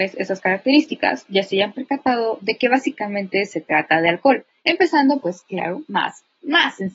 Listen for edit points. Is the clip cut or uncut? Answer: cut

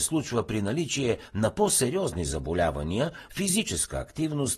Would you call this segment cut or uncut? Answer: cut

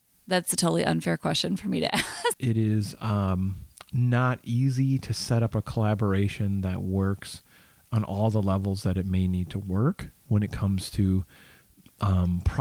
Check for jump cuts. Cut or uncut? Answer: cut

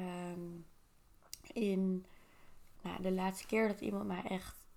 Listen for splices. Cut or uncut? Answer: cut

